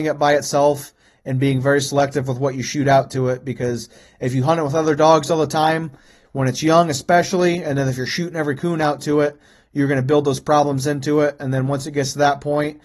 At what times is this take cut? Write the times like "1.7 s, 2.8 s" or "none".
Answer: none